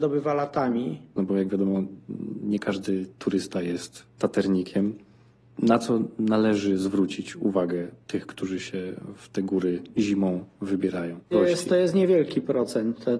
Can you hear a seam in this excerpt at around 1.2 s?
yes; 2 cuts; at 1.2 s, 11.3 s

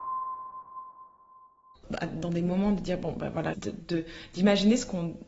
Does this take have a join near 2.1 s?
no; 1 cut; at 3.5 s

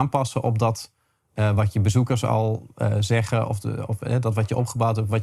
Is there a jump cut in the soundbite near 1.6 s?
no; 0 cuts

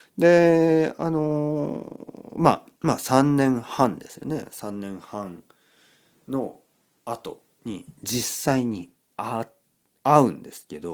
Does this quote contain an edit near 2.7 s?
yes; 1 cut; at 2.7 s

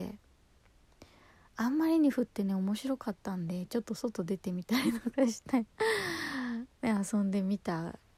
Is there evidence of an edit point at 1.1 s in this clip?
no; 1 cut; at 5.7 s

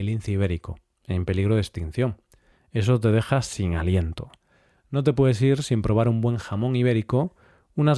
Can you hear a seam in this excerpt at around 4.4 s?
no; 1 cut; at 2.5 s

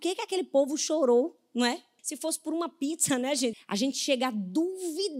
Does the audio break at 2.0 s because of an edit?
yes; 2 cuts; at 2.0 s, 3.5 s

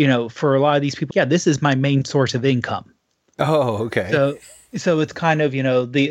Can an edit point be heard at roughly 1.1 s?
yes; 1 cut; at 1.1 s

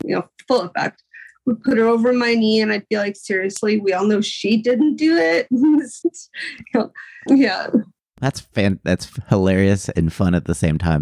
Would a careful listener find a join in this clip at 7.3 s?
yes; 2 cuts; at 6.0 s, 7.3 s

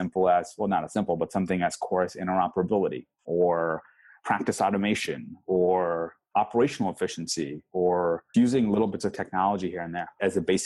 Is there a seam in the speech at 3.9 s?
no; 1 cut; at 8.3 s

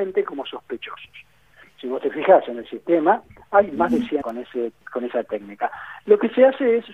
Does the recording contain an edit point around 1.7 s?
no; 1 cut; at 4.2 s

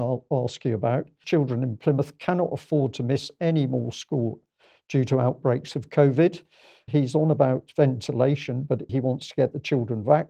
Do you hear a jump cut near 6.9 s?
yes; 3 cuts; at 1.2 s, 6.9 s, 8.9 s

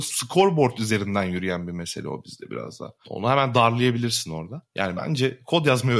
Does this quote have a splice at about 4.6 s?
yes; 2 cuts; at 3.0 s, 4.6 s

